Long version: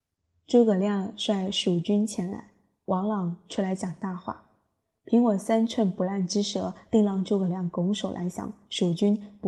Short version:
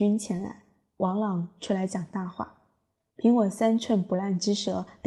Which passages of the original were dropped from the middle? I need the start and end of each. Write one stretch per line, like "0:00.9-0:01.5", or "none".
none